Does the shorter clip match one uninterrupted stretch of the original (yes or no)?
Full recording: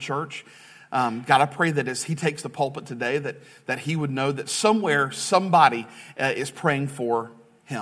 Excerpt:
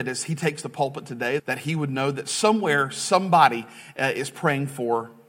no